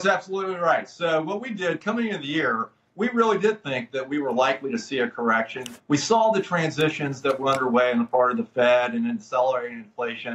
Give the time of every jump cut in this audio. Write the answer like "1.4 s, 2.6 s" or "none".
5.8 s